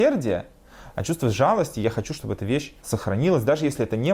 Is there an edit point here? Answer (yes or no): yes